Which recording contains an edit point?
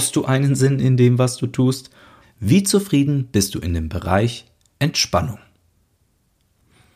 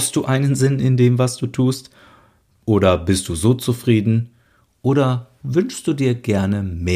first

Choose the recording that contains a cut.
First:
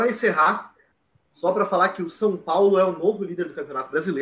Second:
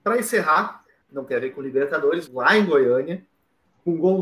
second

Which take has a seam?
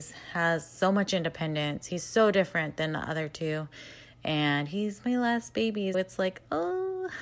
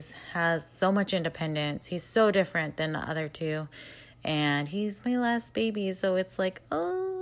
first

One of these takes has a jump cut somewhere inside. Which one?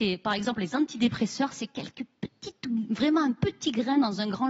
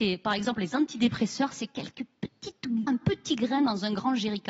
second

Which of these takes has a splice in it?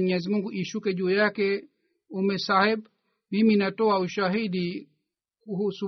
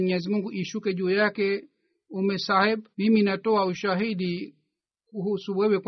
second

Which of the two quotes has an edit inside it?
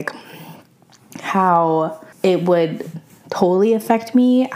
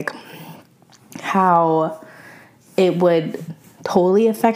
first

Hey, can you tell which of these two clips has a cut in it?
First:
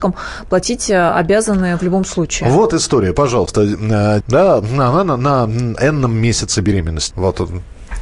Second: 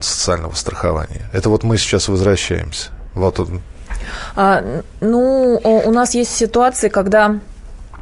first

